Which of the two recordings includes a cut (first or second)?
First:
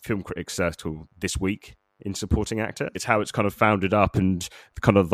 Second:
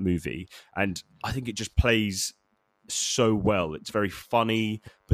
first